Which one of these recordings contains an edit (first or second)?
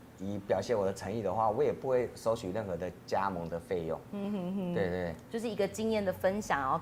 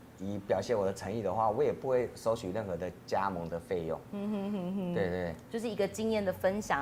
first